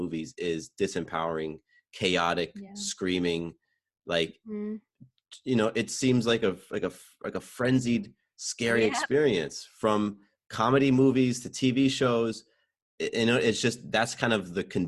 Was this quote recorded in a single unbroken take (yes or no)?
yes